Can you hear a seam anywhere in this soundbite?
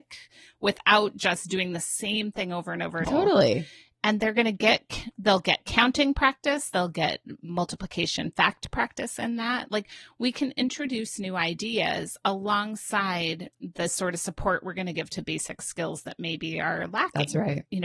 yes; 1 cut; at 3.0 s

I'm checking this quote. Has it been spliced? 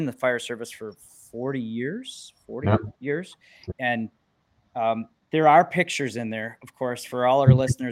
yes; 1 cut; at 3.7 s

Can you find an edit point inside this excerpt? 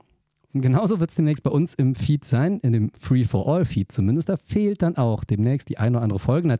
no; 0 cuts

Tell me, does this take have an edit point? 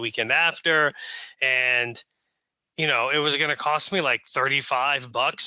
yes; 1 cut; at 1.3 s

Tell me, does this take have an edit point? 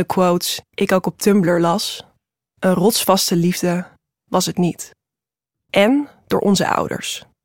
yes; 1 cut; at 5.5 s

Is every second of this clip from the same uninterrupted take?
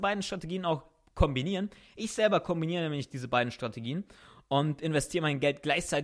yes; 0 cuts

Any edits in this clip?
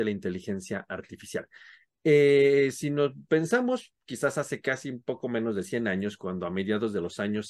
no; 0 cuts

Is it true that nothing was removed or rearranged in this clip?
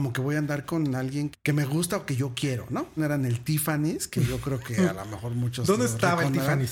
no; 2 cuts; at 1.3 s, 3.0 s

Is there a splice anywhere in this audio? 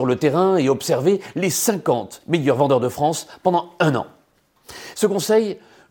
yes; 1 cut; at 4.9 s

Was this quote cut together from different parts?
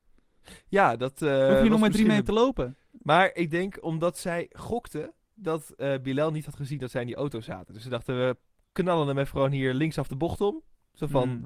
no; 0 cuts

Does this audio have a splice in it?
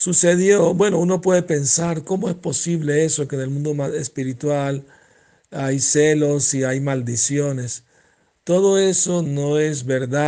no; 0 cuts

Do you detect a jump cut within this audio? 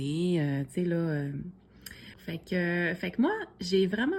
yes; 1 cut; at 2.1 s

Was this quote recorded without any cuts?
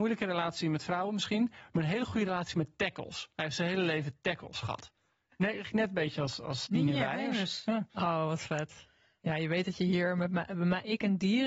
no; 1 cut; at 6.7 s

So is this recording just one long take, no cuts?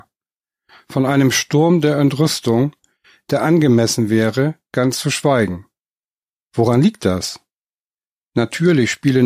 yes; 0 cuts

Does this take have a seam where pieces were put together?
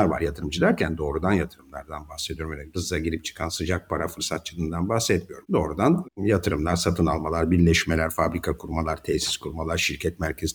no; 0 cuts

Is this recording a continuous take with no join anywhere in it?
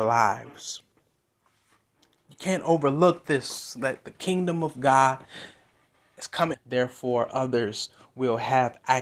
no; 1 cut; at 6.5 s

